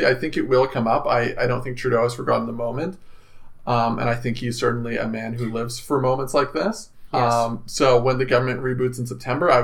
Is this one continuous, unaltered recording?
no; 1 cut; at 7.1 s

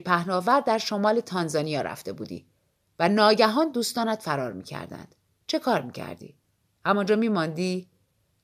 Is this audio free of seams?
yes; 0 cuts

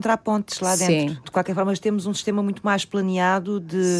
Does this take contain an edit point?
no; 0 cuts

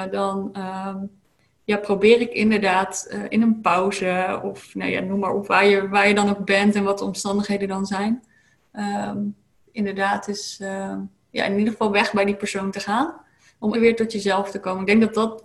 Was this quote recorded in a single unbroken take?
no; 1 cut; at 13.7 s

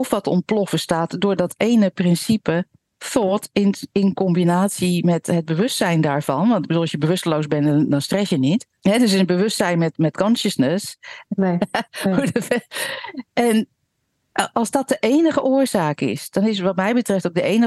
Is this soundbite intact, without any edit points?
no; 2 cuts; at 8.8 s, 11.2 s

